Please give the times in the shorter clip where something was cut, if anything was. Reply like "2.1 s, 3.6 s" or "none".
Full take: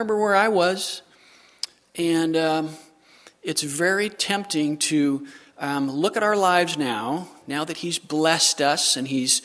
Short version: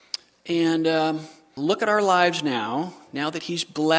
1.6 s